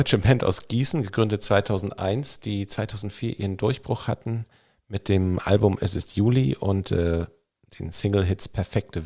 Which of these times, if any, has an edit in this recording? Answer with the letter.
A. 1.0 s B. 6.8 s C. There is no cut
C